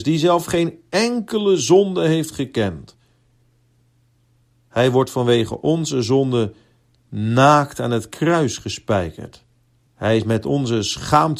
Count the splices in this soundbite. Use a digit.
1